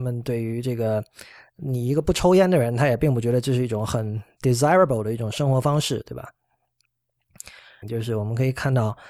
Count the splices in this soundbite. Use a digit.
1